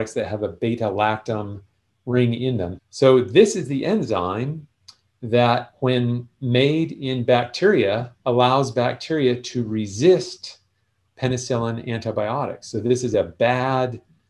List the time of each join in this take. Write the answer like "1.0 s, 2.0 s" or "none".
2.8 s